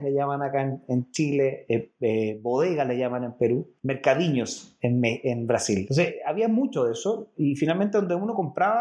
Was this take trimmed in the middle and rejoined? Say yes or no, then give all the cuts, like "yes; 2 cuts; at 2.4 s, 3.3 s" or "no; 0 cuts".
no; 0 cuts